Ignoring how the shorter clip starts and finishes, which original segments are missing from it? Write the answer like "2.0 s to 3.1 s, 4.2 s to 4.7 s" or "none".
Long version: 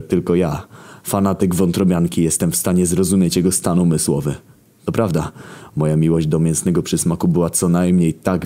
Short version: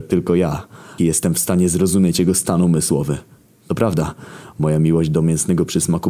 1.0 s to 2.2 s